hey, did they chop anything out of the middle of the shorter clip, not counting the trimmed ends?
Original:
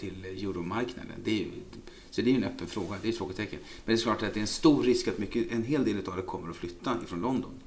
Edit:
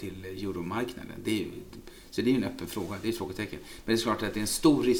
no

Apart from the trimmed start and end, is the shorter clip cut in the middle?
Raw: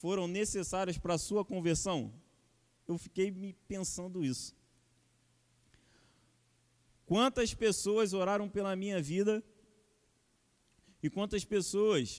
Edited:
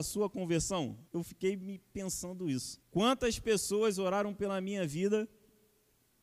yes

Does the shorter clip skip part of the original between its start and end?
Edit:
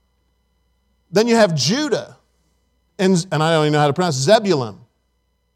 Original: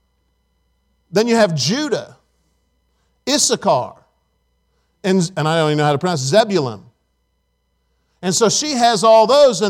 yes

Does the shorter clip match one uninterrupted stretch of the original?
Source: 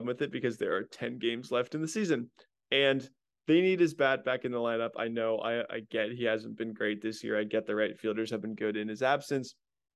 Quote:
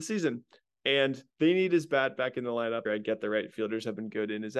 no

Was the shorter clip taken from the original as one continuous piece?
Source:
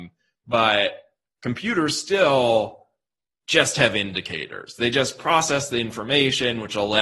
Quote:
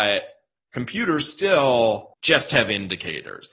no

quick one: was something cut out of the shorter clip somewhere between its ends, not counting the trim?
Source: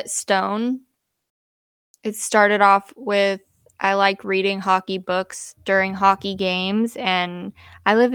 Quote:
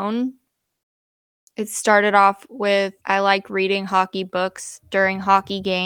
yes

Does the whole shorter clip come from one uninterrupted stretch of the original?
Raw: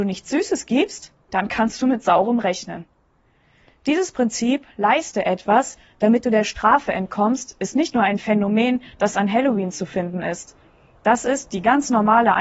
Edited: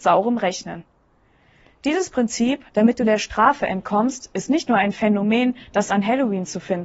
no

